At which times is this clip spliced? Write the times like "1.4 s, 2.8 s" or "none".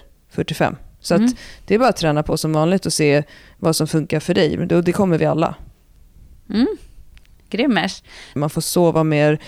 4.6 s, 8.4 s